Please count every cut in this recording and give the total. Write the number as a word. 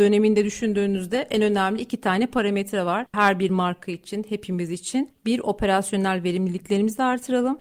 zero